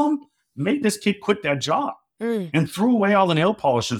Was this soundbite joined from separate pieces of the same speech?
no; 0 cuts

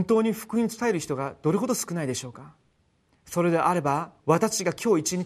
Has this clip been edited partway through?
yes; 1 cut; at 4.2 s

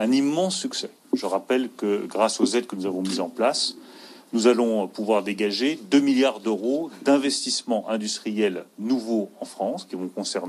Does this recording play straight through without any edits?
yes; 0 cuts

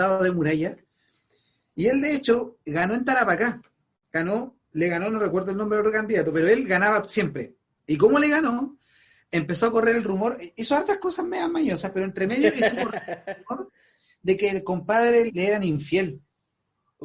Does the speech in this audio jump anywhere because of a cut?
yes; 2 cuts; at 7.8 s, 15.3 s

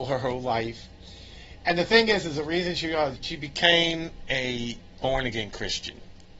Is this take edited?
yes; 1 cut; at 3.2 s

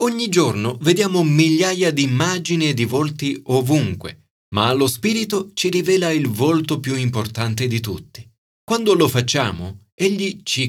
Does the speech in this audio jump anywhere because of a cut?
yes; 1 cut; at 8.5 s

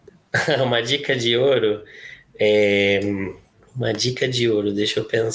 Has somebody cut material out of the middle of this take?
no; 0 cuts

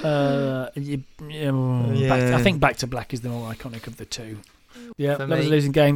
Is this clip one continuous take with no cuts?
no; 1 cut; at 4.9 s

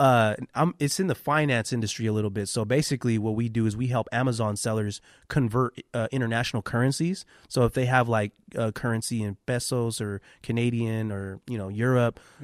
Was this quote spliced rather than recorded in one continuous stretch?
no; 0 cuts

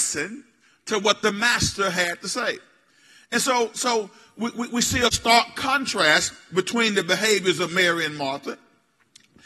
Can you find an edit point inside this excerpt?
no; 0 cuts

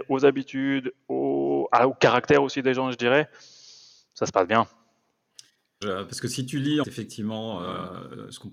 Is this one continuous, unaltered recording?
no; 2 cuts; at 5.8 s, 6.8 s

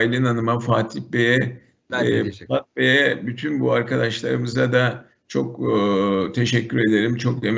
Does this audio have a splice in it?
no; 0 cuts

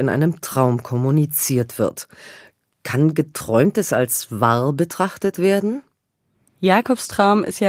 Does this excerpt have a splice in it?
no; 0 cuts

